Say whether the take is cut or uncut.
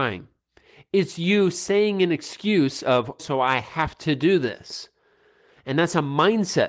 cut